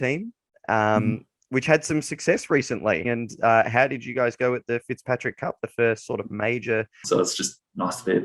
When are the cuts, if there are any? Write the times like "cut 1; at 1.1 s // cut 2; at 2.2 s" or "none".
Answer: cut 1; at 3.0 s // cut 2; at 7.0 s